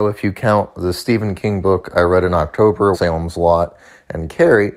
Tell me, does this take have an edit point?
yes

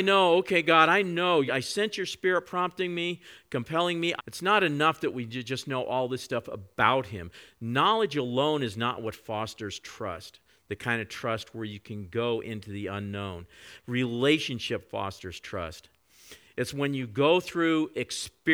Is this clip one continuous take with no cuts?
no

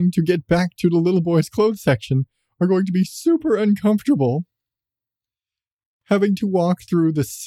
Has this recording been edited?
no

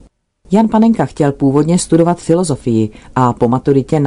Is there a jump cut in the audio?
no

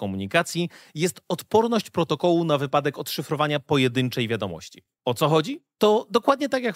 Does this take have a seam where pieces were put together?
no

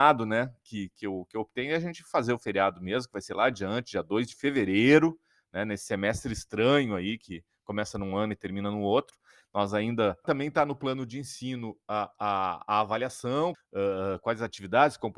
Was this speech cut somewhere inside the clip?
yes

